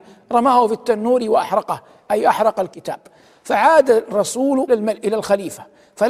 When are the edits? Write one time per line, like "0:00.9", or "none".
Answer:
0:04.7